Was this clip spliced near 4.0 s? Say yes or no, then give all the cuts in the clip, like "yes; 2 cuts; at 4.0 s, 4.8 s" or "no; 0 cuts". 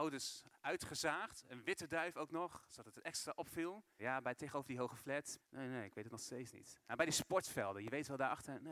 yes; 2 cuts; at 4.0 s, 5.4 s